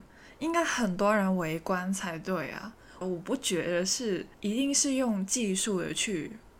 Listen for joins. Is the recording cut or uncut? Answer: cut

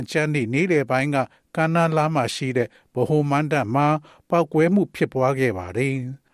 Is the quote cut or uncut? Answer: uncut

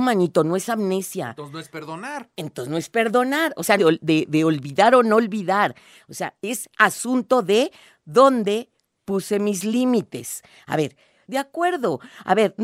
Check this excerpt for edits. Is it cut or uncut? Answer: cut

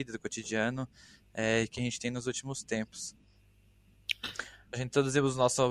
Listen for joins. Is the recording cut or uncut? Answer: cut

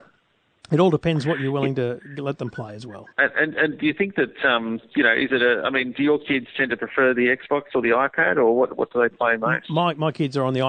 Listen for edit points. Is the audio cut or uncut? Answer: cut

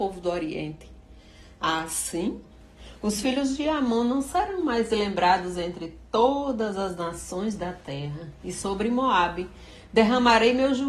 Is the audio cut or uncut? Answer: uncut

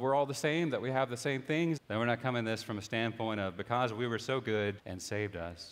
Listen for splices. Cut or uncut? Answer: cut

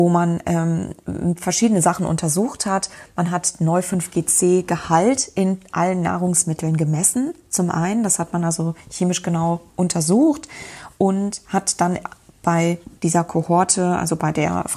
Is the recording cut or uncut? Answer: cut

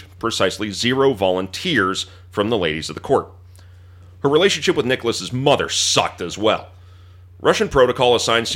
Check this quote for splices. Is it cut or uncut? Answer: uncut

